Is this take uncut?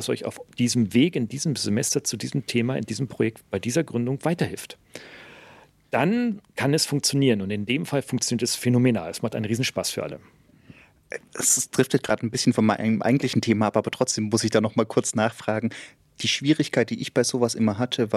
yes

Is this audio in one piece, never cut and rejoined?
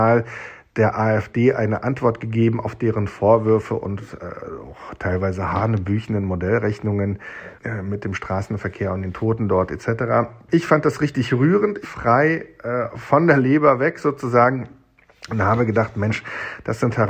no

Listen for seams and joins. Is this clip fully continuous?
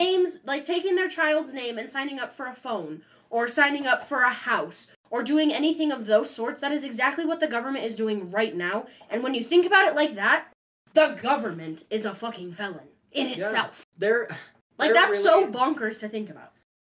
no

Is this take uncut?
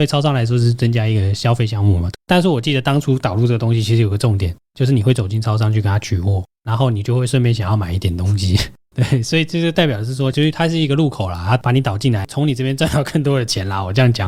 no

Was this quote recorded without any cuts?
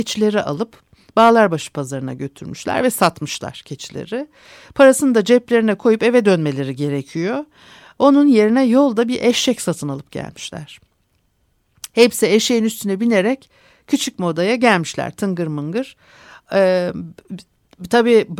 yes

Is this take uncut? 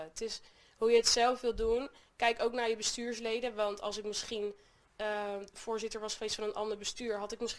yes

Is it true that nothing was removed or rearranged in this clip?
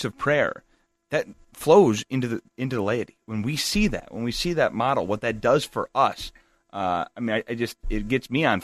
no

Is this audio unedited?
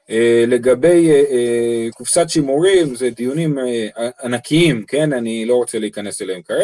yes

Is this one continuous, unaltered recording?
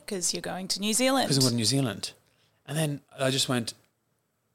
yes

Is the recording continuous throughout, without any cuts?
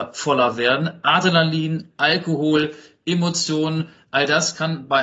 yes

